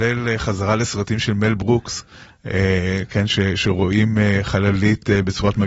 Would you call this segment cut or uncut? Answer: uncut